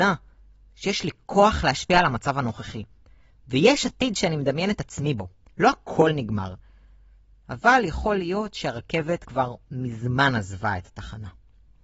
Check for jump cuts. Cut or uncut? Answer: uncut